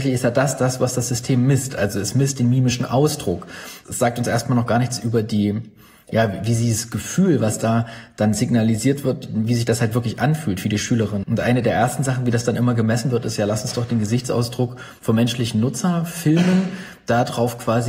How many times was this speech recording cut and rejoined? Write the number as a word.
one